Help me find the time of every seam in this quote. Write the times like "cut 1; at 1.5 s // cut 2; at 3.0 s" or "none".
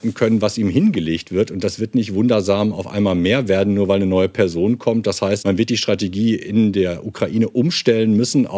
cut 1; at 5.4 s